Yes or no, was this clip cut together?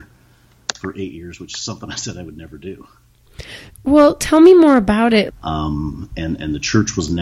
yes